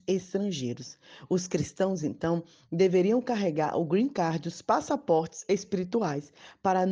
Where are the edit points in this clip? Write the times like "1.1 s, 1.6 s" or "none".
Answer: none